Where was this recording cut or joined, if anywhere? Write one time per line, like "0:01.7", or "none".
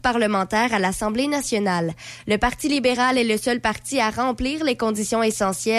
none

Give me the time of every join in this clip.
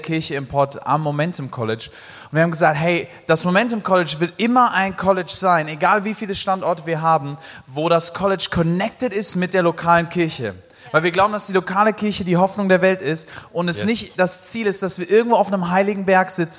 none

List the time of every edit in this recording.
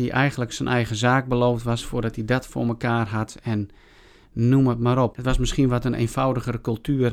0:05.1

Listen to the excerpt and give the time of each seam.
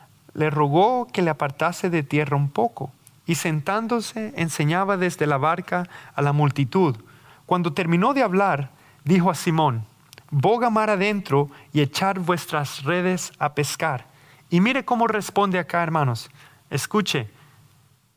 none

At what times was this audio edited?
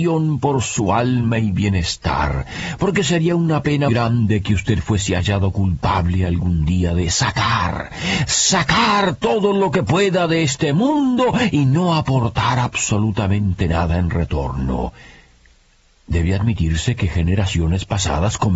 0:03.9

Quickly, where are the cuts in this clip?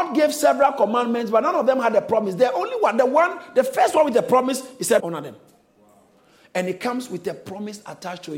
0:05.0

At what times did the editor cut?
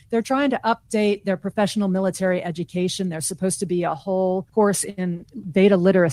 none

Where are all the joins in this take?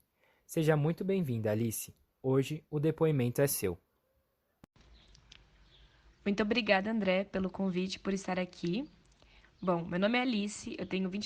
none

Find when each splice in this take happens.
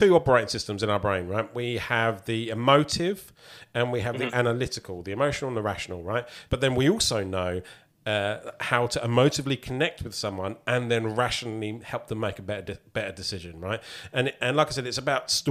0:06.5

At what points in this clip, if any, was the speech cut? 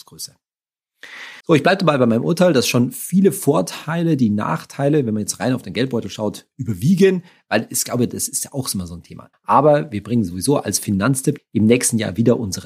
0:01.4
0:09.3
0:11.4

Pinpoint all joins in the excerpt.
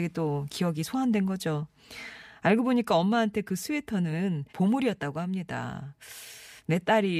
0:04.5

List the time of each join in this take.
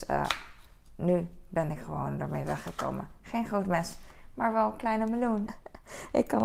0:05.5

